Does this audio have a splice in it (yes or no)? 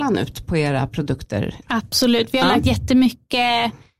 yes